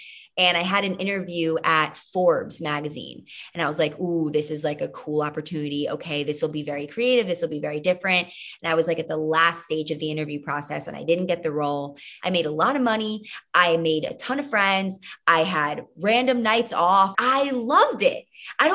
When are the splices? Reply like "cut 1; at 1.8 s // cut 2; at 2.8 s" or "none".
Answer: cut 1; at 12.2 s // cut 2; at 17.1 s